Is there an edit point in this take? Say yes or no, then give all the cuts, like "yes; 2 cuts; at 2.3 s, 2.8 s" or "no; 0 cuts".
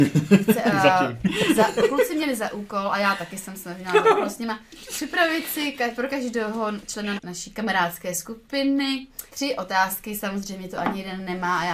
yes; 2 cuts; at 7.2 s, 9.3 s